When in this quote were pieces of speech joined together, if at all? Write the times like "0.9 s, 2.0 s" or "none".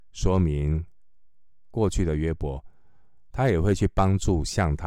none